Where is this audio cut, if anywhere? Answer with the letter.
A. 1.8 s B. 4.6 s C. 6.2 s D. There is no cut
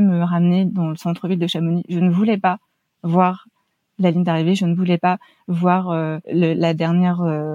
C